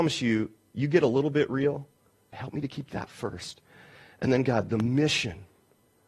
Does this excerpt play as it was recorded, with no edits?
no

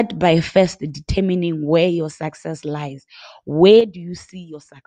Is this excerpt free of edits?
yes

